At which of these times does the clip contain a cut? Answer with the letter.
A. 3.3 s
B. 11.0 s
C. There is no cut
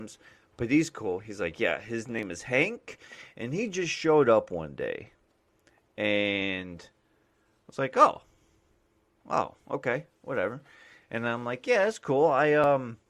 B